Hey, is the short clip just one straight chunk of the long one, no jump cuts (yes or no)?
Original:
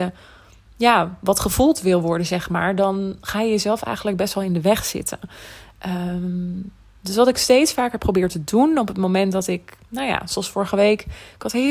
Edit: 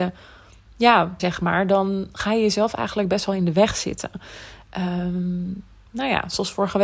no